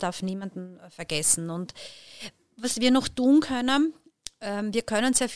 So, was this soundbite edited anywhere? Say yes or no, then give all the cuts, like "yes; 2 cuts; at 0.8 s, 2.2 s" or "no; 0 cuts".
no; 0 cuts